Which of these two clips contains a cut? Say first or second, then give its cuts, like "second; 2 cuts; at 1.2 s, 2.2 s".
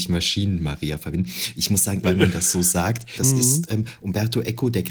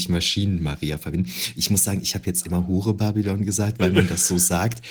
first; 2 cuts; at 2.0 s, 3.2 s